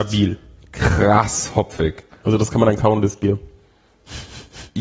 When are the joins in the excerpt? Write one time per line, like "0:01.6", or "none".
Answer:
0:02.1

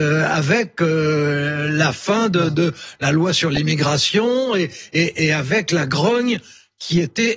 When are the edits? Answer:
none

